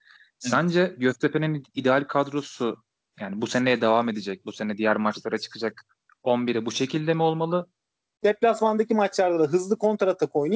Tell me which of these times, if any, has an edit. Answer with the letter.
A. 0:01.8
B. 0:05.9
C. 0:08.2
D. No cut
C